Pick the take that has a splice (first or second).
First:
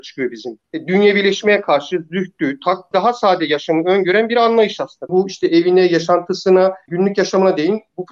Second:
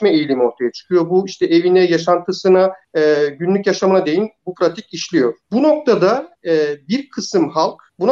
first